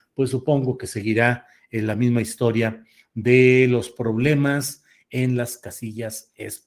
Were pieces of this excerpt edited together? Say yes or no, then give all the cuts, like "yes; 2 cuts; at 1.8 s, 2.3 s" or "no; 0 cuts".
no; 0 cuts